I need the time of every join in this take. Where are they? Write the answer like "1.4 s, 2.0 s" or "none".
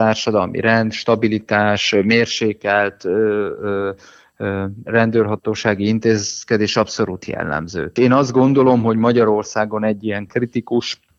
8.0 s